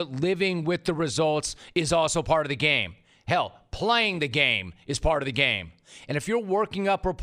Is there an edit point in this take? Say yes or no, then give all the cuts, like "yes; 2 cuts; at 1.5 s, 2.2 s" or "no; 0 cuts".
no; 0 cuts